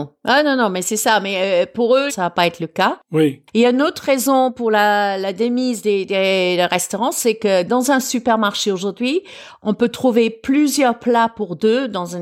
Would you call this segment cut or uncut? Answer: cut